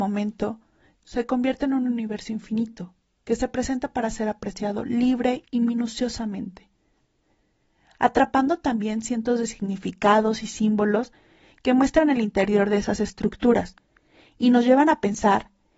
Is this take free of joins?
no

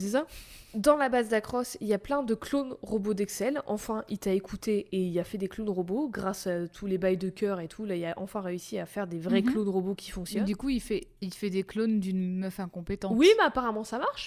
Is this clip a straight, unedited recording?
yes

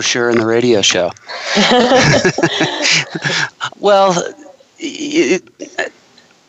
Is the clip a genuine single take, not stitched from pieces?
no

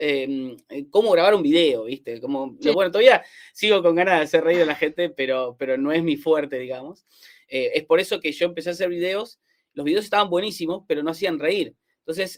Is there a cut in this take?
yes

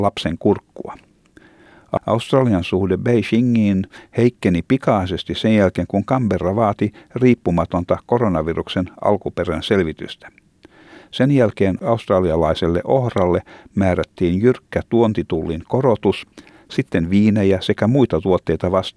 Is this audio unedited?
no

